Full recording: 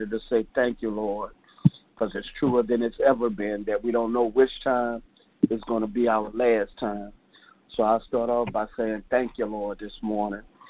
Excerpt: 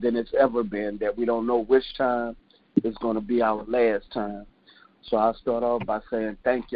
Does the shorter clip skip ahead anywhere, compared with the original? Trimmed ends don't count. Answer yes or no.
no